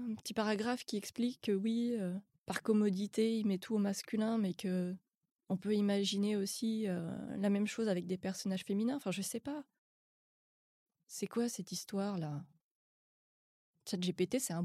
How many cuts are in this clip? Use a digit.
0